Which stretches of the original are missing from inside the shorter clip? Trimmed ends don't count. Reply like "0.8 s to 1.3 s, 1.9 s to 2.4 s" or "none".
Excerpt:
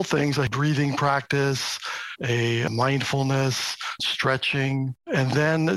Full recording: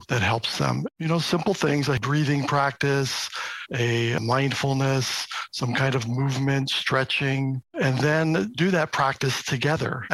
5.5 s to 6.7 s